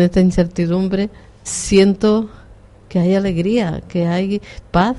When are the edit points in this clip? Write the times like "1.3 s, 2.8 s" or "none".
1.5 s